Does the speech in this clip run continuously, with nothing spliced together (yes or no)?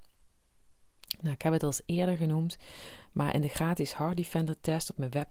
yes